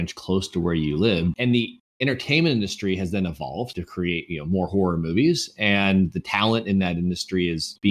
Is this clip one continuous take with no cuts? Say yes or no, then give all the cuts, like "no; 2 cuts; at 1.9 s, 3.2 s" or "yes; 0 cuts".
no; 1 cut; at 1.3 s